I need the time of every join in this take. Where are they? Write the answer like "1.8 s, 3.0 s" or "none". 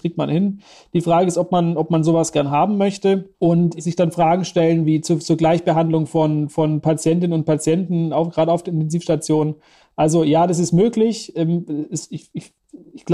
3.3 s, 12.1 s